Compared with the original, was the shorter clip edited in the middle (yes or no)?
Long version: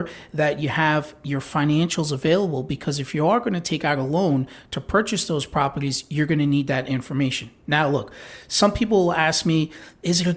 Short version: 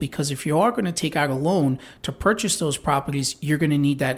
no